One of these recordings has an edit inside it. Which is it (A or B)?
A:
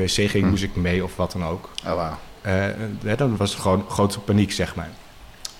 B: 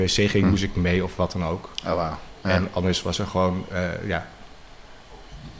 A